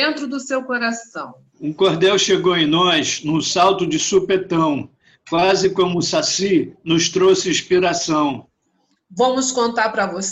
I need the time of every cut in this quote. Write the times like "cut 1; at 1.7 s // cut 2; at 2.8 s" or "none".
cut 1; at 1.5 s // cut 2; at 9.0 s